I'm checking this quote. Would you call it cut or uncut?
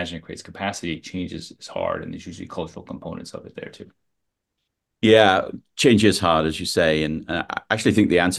uncut